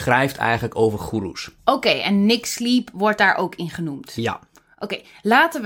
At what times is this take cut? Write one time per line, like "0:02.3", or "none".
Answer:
0:01.6